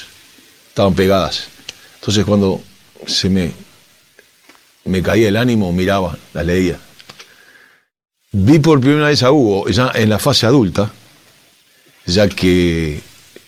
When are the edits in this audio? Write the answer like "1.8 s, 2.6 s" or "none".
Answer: none